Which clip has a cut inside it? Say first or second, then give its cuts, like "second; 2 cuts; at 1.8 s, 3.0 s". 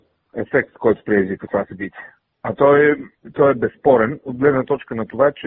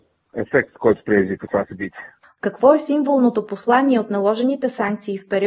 second; 1 cut; at 2.2 s